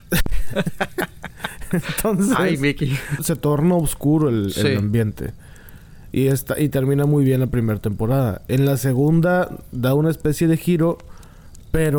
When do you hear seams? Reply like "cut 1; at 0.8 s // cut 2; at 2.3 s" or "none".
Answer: cut 1; at 3.2 s